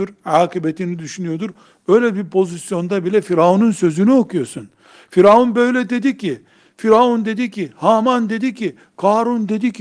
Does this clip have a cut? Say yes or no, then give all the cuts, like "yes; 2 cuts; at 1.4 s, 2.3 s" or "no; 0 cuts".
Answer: no; 0 cuts